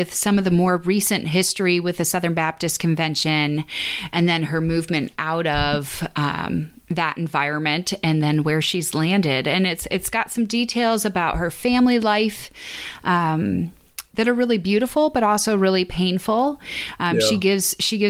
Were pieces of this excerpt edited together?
no; 0 cuts

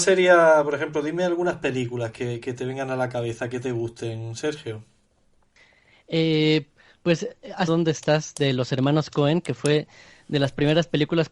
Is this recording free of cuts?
no; 1 cut; at 7.7 s

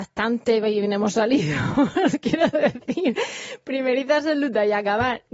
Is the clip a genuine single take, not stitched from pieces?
yes; 0 cuts

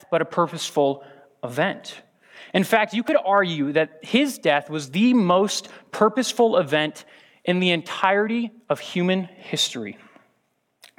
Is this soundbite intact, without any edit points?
yes; 0 cuts

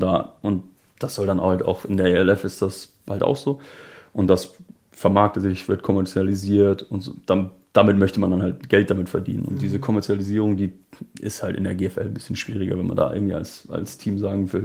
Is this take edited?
no; 0 cuts

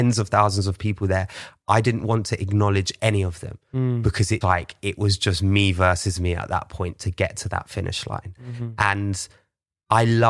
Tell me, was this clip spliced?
yes; 1 cut; at 4.4 s

